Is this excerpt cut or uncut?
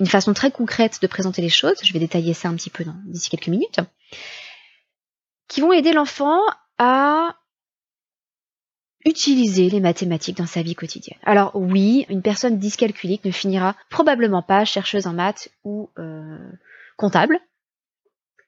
cut